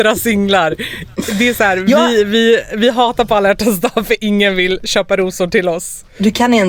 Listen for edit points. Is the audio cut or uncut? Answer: uncut